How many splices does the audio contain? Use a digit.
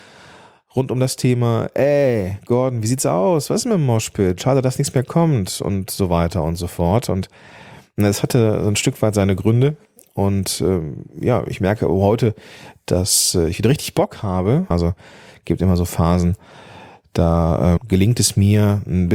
2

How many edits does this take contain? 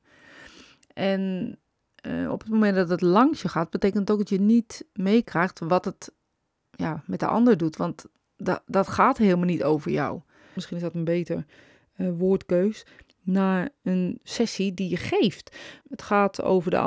2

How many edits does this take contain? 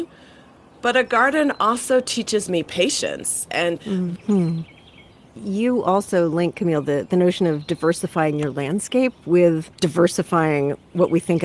2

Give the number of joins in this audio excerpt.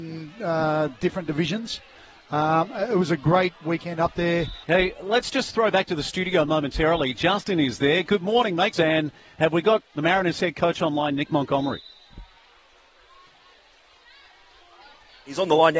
2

